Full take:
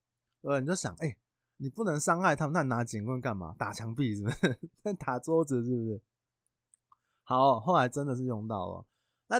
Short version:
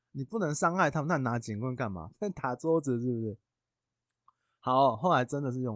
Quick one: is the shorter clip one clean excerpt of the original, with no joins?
no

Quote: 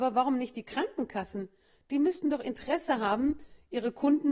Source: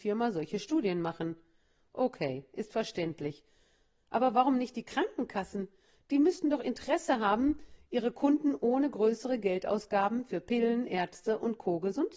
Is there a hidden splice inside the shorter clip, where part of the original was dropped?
no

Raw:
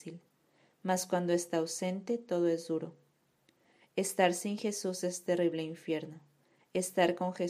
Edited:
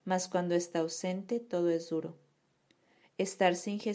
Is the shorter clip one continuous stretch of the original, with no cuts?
yes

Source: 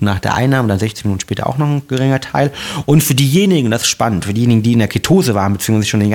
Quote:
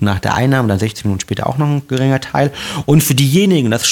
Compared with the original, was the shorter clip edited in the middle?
no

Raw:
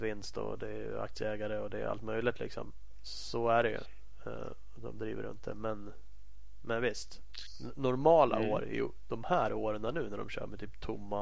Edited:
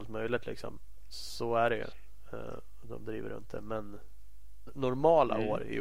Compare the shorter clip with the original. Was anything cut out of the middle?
yes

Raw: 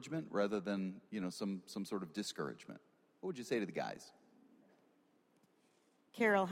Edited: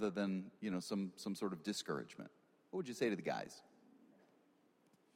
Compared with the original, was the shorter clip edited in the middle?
no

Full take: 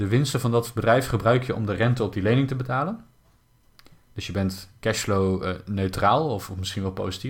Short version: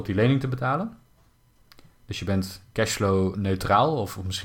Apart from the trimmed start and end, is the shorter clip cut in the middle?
yes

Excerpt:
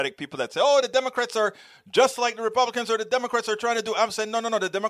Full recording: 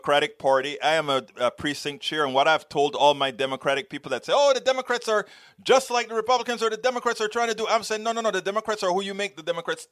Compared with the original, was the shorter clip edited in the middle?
no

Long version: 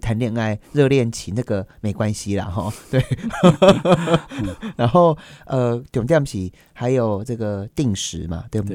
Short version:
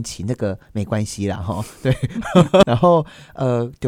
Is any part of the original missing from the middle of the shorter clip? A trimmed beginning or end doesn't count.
yes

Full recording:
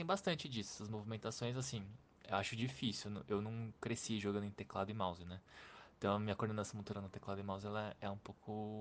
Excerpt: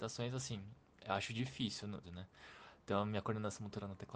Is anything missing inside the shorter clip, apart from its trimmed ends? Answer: yes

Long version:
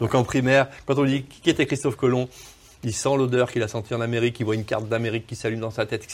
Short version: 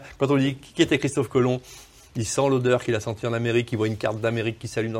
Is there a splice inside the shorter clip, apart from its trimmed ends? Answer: no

